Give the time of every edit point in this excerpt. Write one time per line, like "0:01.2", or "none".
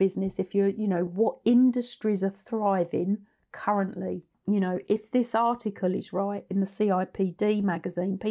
0:01.1
0:04.3